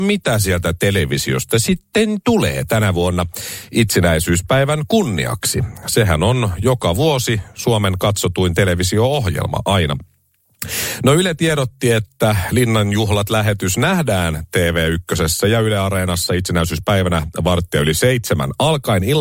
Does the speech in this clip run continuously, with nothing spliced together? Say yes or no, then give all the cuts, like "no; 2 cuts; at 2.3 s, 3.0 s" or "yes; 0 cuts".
yes; 0 cuts